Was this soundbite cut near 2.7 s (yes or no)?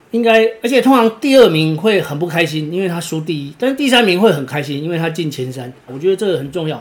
no